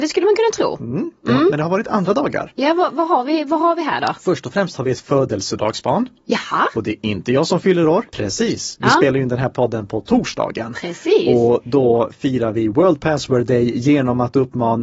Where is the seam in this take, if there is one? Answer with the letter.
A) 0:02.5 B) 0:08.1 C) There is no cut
B